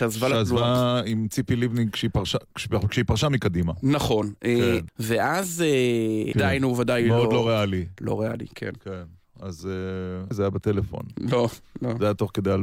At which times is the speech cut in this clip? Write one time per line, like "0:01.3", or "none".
0:04.9
0:06.3
0:10.3